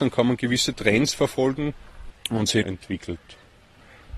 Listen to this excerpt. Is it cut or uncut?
cut